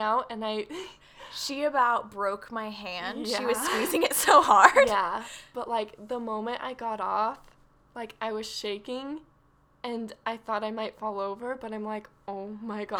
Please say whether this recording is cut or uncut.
uncut